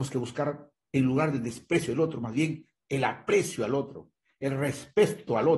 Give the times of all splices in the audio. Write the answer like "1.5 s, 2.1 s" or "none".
none